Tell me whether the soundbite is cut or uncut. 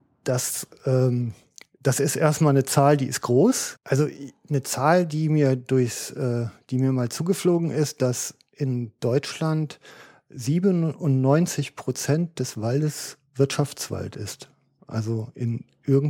cut